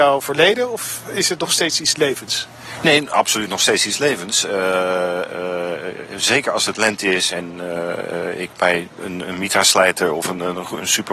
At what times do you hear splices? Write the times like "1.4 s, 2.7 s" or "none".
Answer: none